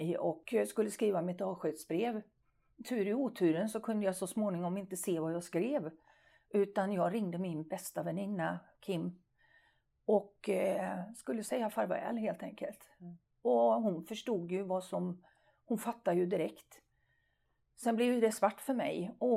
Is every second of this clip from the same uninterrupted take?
yes; 0 cuts

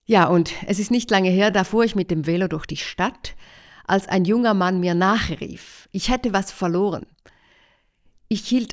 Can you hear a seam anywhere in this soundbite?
no; 0 cuts

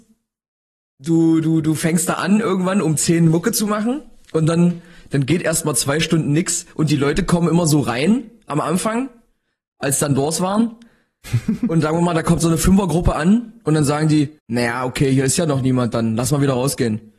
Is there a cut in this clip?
yes; 1 cut; at 14.4 s

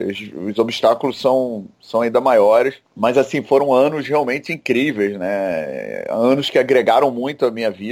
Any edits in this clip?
yes; 1 cut; at 2.8 s

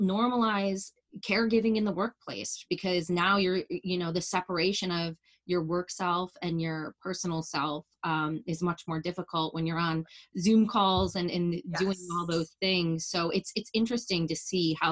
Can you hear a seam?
no; 0 cuts

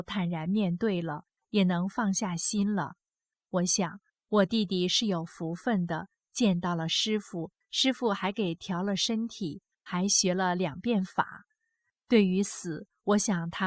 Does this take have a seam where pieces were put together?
no; 0 cuts

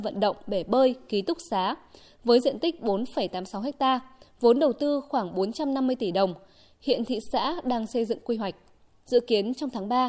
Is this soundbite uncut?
no; 1 cut; at 9.0 s

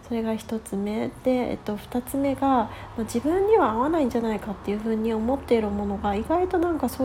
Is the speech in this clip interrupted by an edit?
no; 0 cuts

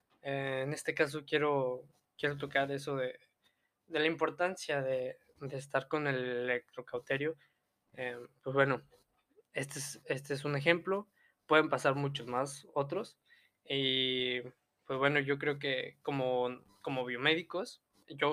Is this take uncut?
yes; 0 cuts

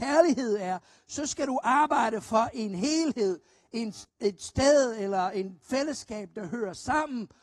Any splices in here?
yes; 1 cut; at 4.1 s

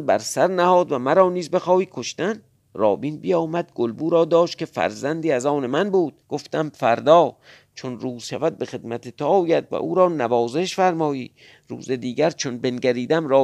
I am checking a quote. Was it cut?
yes; 1 cut; at 6.2 s

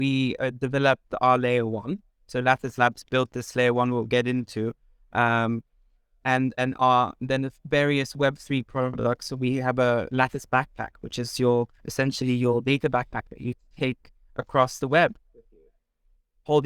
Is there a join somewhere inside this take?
no; 0 cuts

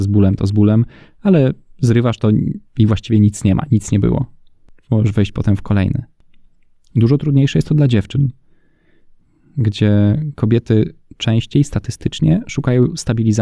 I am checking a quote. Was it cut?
no; 0 cuts

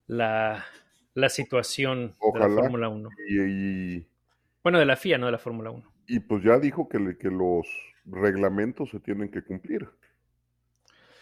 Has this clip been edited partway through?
no; 0 cuts

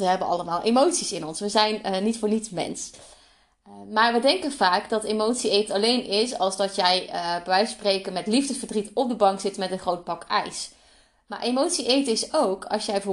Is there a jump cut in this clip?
no; 0 cuts

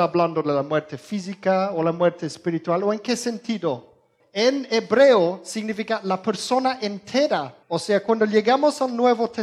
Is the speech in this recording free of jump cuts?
no; 2 cuts; at 4.2 s, 7.6 s

